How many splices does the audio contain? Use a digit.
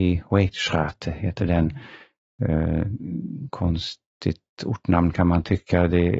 0